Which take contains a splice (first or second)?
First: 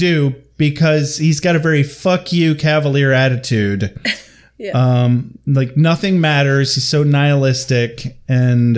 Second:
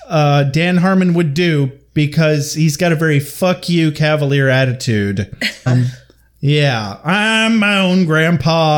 second